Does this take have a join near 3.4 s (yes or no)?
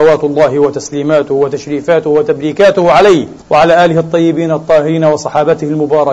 yes